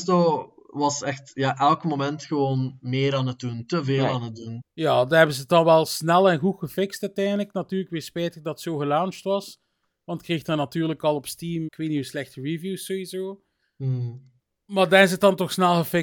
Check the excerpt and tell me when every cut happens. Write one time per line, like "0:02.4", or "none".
0:04.6
0:11.7